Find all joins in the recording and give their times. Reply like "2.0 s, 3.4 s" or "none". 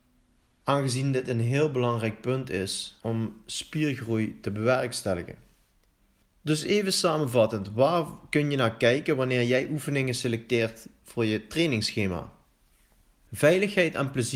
none